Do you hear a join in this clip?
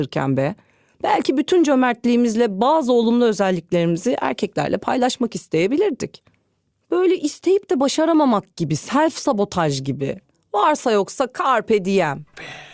yes; 1 cut; at 6.8 s

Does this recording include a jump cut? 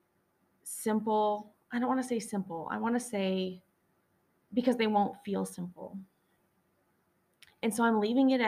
no; 0 cuts

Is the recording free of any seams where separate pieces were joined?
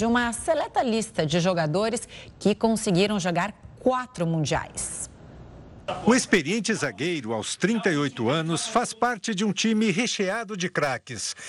yes; 0 cuts

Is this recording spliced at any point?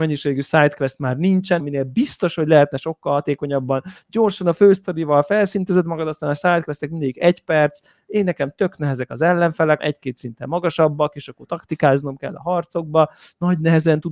yes; 2 cuts; at 1.6 s, 9.8 s

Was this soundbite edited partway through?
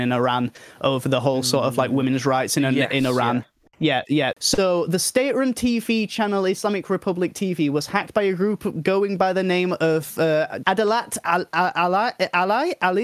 yes; 2 cuts; at 4.3 s, 10.6 s

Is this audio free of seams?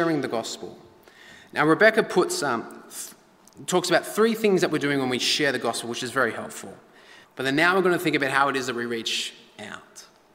no; 1 cut; at 7.2 s

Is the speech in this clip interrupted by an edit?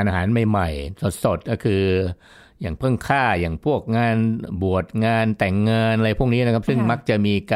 no; 0 cuts

